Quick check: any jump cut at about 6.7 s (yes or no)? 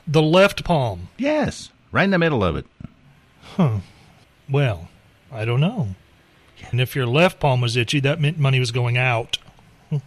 yes